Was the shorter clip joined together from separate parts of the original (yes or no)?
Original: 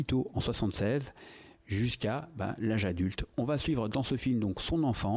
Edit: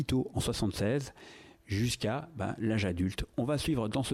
no